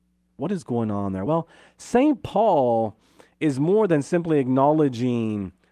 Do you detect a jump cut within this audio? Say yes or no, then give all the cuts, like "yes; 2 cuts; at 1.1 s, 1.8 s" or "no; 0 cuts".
no; 0 cuts